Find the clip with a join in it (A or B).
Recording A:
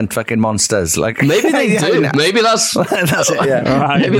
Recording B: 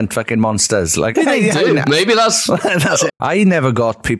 B